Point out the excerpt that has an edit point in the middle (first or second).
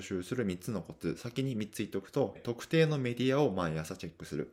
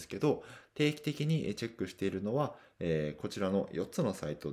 first